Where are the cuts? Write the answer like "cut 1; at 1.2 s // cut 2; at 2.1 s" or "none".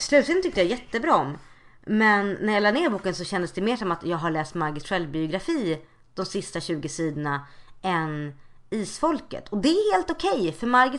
none